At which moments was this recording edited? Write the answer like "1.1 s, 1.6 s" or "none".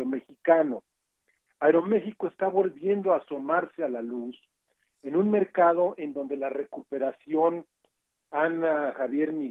1.5 s